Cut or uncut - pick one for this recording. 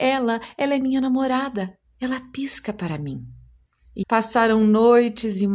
cut